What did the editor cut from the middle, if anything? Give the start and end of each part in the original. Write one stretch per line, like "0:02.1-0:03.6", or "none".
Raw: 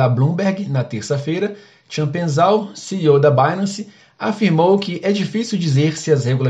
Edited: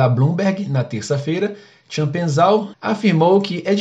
0:02.7-0:04.1